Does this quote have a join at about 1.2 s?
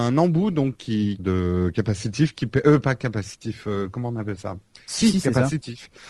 yes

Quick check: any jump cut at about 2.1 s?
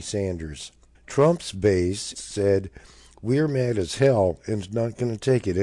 yes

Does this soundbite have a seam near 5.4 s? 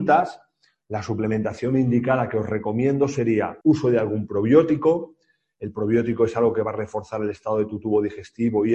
no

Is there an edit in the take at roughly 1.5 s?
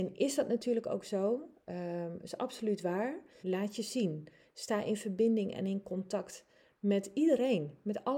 no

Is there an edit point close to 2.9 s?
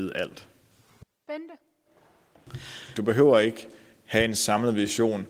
yes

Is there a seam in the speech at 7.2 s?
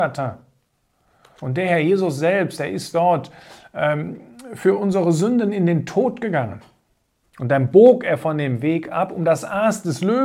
yes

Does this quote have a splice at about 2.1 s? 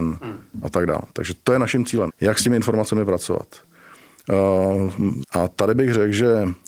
yes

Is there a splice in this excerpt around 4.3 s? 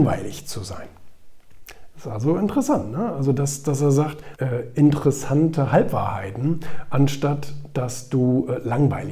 yes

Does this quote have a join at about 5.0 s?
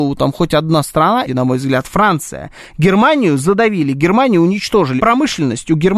yes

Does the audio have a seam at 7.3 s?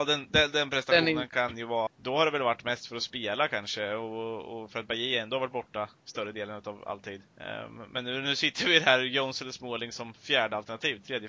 yes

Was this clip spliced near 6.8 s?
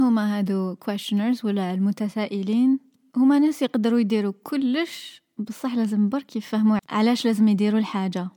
yes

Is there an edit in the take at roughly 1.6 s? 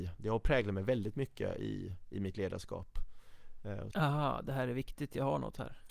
no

